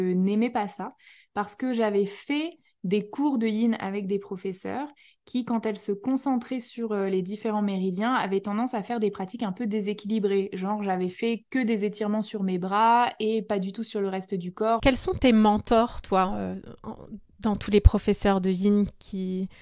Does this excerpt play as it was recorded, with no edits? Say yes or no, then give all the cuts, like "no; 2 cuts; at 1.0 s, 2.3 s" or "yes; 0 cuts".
no; 1 cut; at 14.8 s